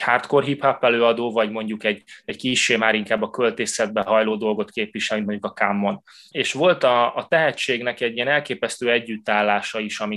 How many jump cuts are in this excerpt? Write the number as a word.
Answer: one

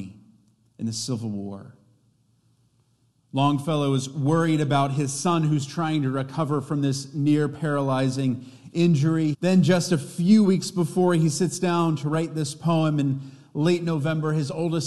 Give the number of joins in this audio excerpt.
two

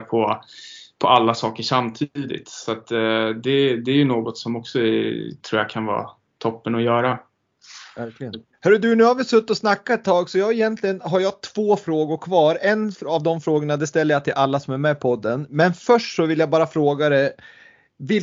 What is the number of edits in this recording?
one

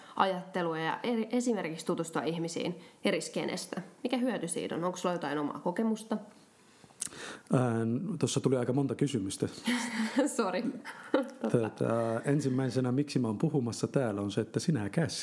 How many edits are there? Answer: zero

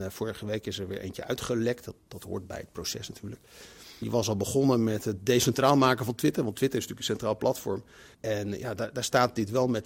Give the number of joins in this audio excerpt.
two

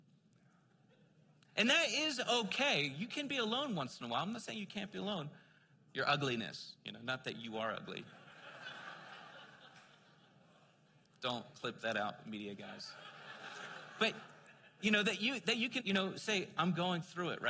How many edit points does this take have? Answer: two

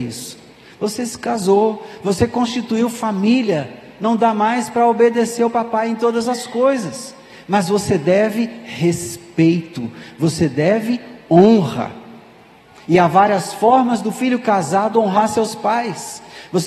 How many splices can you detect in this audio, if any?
zero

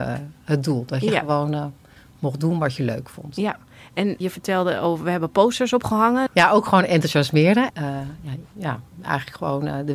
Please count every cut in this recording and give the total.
three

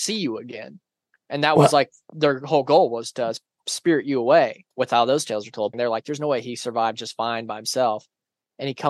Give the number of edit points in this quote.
two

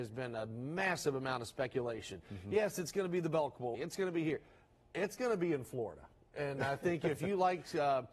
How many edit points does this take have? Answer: one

